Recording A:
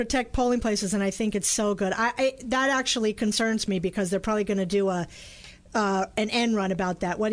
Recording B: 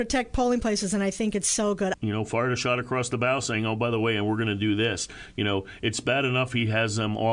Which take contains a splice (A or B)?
B